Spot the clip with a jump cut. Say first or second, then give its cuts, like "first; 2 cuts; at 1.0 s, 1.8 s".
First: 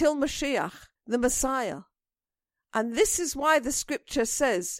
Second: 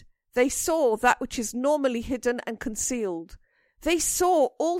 first; 1 cut; at 1.0 s